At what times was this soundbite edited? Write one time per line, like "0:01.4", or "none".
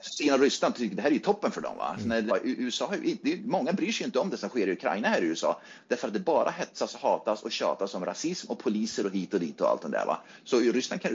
0:02.3